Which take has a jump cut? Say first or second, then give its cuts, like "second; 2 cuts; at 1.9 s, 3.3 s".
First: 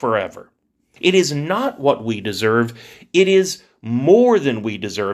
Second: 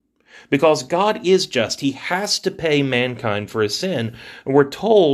first; 1 cut; at 1.0 s